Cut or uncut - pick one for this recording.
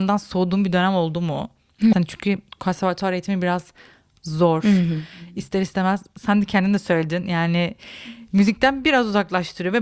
cut